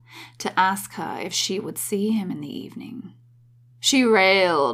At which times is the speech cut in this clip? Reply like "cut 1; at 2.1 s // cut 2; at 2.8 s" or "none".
cut 1; at 3.7 s